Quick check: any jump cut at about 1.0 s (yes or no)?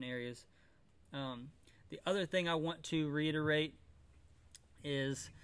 yes